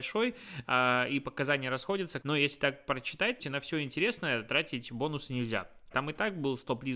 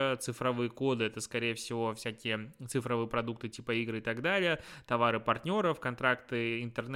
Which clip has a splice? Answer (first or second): first